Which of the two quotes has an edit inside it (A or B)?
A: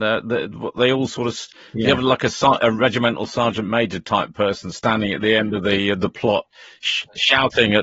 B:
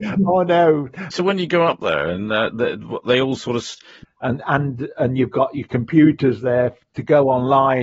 B